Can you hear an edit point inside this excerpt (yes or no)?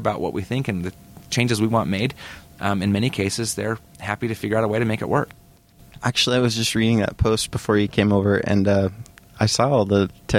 no